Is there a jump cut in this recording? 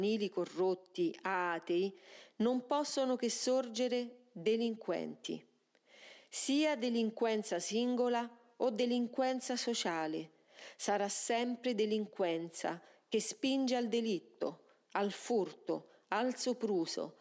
no; 0 cuts

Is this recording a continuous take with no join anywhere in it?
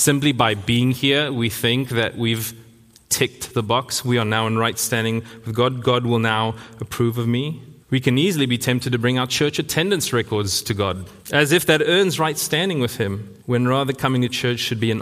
no; 3 cuts; at 7.8 s, 11.2 s, 13.4 s

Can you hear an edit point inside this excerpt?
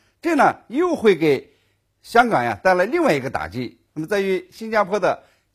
no; 0 cuts

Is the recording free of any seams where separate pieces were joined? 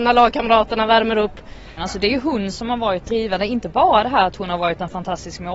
no; 1 cut; at 1.8 s

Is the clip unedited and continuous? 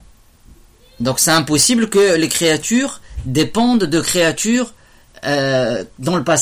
yes; 0 cuts

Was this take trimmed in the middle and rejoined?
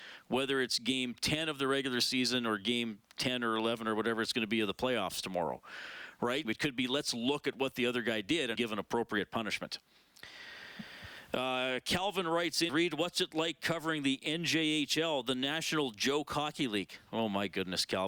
yes; 3 cuts; at 6.4 s, 8.5 s, 12.7 s

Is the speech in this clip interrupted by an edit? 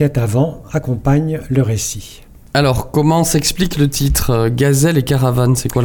no; 0 cuts

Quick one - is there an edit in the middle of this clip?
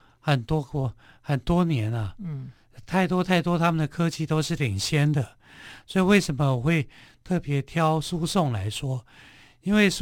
no; 0 cuts

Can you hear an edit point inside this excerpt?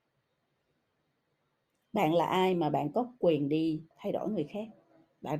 yes; 1 cut; at 3.9 s

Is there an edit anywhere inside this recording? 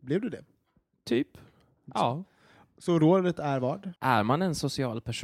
yes; 1 cut; at 4.0 s

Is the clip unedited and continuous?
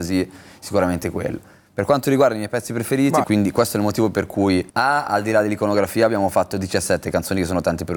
no; 2 cuts; at 3.2 s, 4.7 s

